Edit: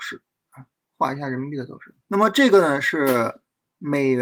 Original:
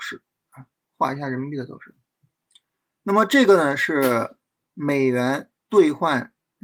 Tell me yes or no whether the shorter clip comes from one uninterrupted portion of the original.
no